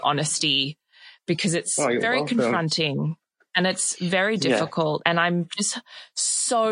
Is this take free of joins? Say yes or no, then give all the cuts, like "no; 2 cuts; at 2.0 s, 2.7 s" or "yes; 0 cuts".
yes; 0 cuts